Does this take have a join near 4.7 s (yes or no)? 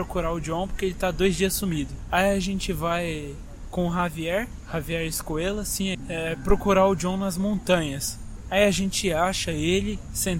no